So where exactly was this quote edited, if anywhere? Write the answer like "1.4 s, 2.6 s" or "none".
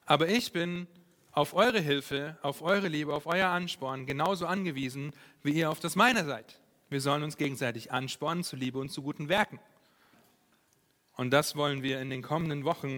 none